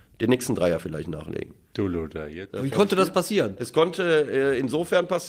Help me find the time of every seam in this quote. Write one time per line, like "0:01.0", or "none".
0:02.5